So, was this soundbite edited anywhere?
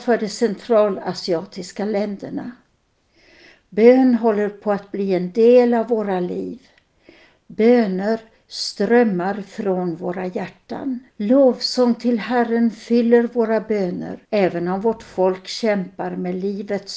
yes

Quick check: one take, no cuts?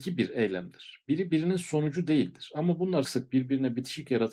no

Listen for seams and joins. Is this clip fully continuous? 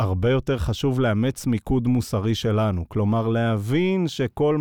yes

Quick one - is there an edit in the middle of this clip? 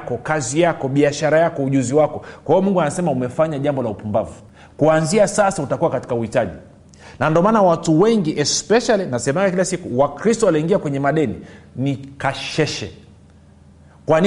no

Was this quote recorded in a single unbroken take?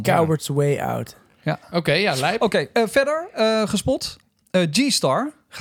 yes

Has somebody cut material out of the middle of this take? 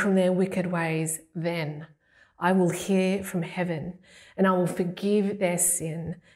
no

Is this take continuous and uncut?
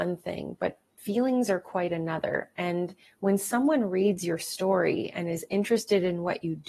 yes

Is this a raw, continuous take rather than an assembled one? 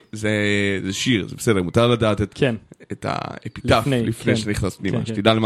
no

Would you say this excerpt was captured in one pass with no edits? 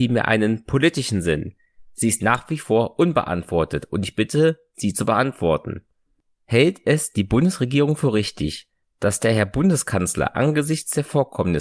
yes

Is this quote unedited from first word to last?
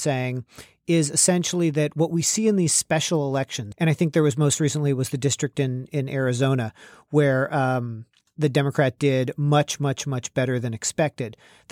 no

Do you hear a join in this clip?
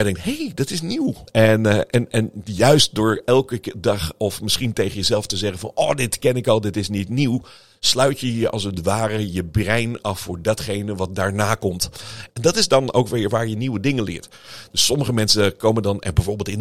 yes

